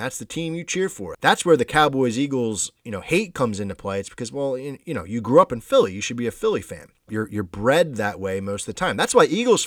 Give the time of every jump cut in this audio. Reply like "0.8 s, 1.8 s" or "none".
1.1 s, 7.1 s